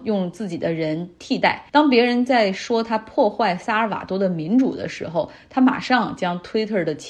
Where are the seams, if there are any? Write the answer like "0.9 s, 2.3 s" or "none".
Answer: 1.7 s